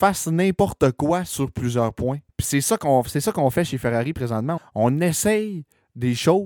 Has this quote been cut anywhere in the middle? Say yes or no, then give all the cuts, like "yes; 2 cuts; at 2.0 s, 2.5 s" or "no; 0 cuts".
yes; 2 cuts; at 2.3 s, 4.6 s